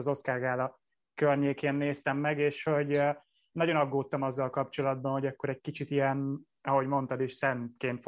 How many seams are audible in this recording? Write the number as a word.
zero